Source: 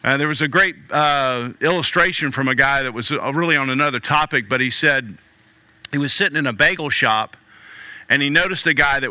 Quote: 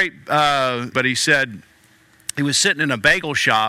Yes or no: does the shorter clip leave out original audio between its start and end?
yes